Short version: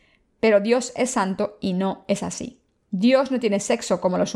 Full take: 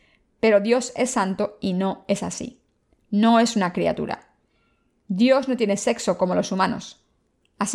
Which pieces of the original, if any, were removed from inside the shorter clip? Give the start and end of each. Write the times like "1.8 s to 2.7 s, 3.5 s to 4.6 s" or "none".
2.9 s to 5.0 s